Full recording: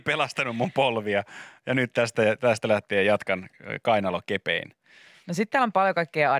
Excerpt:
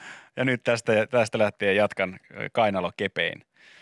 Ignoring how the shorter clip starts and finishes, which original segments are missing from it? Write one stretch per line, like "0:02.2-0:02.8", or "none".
none